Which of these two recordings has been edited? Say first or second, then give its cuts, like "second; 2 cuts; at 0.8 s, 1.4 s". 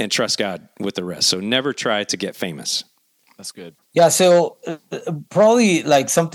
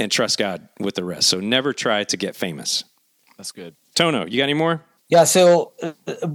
first; 1 cut; at 3.8 s